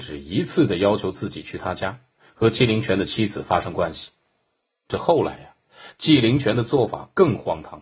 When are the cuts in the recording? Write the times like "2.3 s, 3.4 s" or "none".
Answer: none